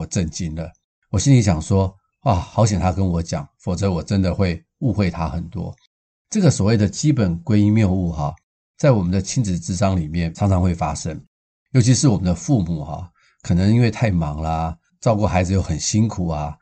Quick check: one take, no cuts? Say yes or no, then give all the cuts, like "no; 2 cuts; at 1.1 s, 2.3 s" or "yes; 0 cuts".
yes; 0 cuts